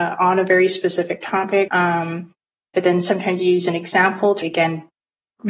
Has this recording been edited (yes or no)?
yes